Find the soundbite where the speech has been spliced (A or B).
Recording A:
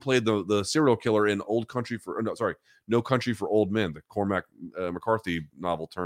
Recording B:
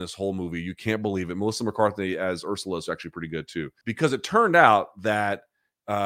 B